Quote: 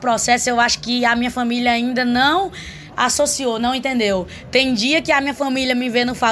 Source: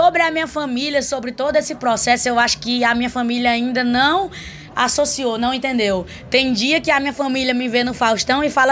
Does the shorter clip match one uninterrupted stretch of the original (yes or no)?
yes